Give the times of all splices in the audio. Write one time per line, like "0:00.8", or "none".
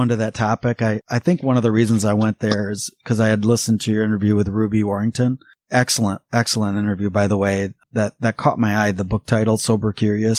0:07.8